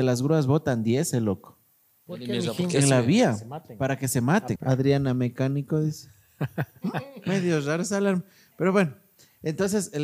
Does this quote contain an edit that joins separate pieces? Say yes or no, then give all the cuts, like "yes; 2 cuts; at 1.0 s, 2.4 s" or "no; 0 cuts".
yes; 1 cut; at 4.6 s